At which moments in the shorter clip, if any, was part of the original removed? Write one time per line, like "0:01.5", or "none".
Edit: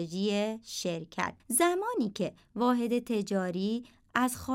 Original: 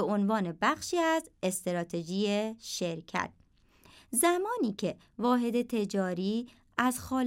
0:01.4